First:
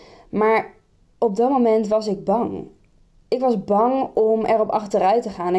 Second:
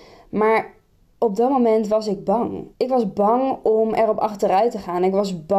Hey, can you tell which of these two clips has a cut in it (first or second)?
second